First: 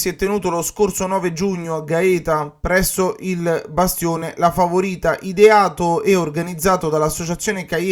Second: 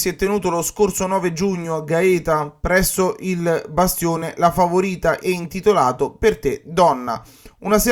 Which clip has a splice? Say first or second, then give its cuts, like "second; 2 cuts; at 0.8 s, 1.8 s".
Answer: second; 1 cut; at 5.2 s